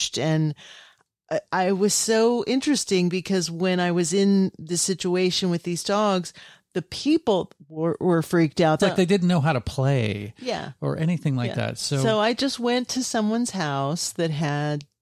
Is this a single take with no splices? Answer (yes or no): no